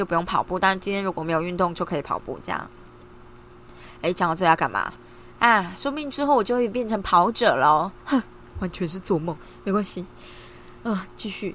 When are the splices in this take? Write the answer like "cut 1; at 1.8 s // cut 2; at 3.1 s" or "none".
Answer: none